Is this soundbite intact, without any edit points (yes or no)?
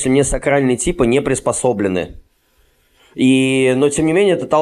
yes